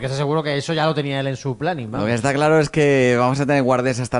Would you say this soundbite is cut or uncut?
uncut